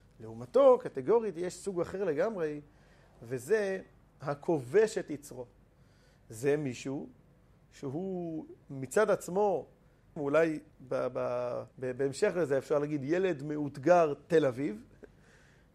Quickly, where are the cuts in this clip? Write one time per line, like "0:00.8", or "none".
0:10.2
0:11.7